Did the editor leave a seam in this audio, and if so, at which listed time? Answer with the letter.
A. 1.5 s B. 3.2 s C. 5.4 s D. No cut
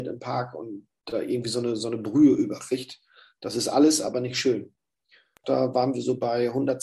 C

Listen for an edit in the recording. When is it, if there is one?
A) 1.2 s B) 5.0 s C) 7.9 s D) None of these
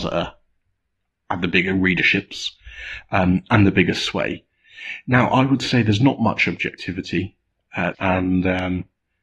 C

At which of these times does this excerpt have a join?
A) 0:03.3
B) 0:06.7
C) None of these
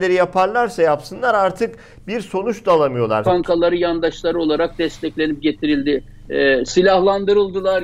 A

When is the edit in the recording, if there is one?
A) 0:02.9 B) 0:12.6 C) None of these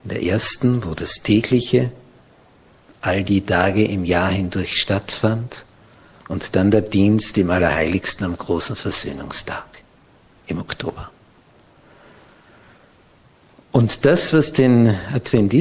C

